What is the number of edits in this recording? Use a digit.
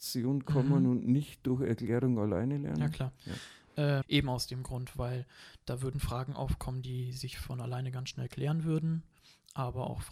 1